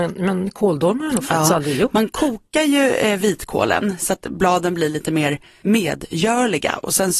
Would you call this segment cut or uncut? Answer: uncut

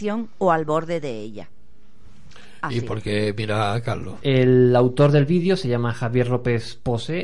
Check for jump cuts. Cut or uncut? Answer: cut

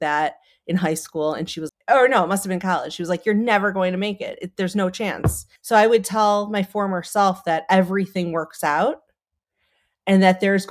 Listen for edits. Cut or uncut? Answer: cut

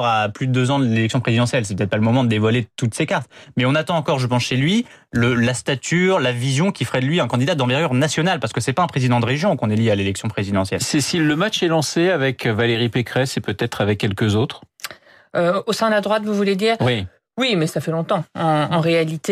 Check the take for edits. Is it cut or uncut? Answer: uncut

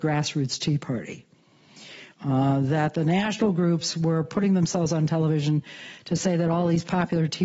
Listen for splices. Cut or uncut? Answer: cut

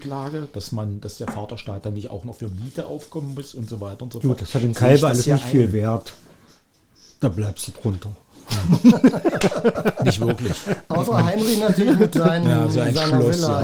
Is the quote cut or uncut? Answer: uncut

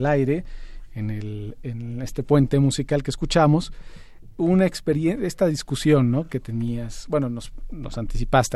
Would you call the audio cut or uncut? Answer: uncut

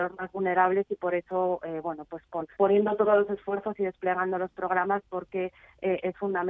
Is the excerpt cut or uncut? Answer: cut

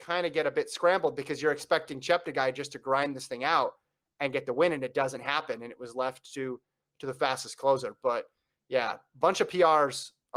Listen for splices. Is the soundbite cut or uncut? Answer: uncut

